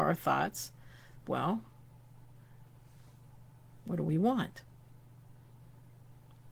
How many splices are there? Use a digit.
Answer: 1